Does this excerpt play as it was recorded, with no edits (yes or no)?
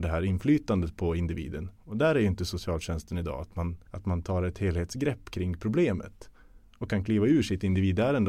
no